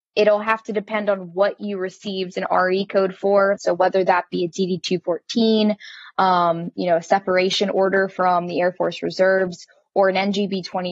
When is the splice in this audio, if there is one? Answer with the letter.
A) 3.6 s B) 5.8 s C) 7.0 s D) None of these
A